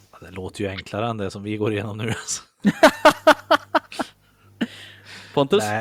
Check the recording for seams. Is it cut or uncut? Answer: uncut